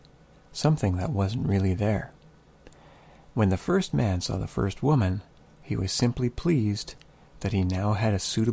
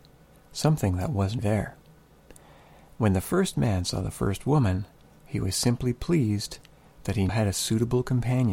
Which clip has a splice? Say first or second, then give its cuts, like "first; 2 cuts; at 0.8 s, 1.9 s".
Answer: second; 2 cuts; at 1.4 s, 7.3 s